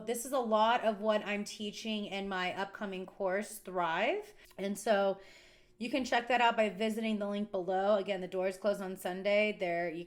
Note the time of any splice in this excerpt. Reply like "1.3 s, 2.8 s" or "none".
4.4 s